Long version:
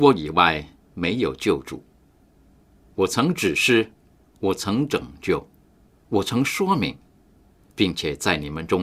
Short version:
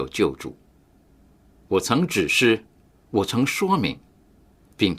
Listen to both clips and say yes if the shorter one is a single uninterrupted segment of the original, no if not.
no